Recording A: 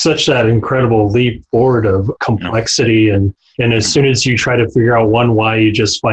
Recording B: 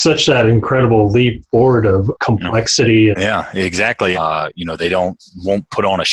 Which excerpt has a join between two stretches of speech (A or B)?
B